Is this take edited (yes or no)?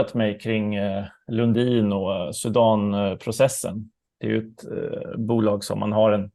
no